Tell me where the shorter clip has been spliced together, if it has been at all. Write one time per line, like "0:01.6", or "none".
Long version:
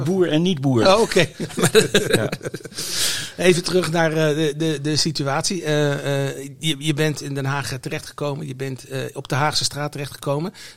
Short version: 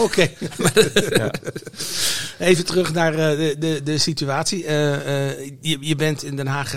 none